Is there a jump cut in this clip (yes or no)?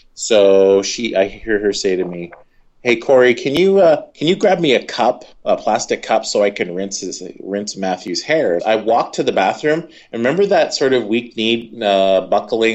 yes